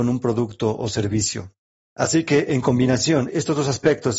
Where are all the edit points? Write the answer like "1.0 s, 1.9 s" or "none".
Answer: 1.7 s